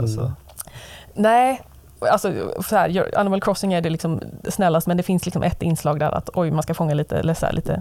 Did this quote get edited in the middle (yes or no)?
yes